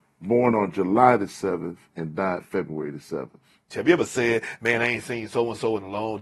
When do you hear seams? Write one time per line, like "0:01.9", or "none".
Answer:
0:03.7